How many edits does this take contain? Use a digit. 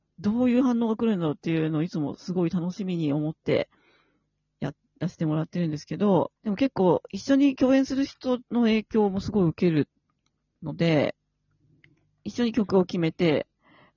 1